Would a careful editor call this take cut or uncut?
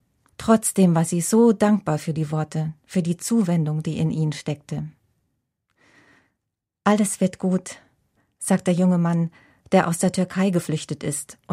uncut